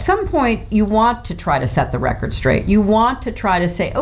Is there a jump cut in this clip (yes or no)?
no